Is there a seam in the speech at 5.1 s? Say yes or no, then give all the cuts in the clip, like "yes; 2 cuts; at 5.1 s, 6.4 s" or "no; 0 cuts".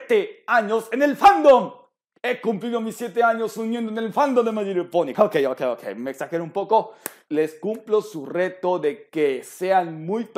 yes; 2 cuts; at 5.1 s, 7.3 s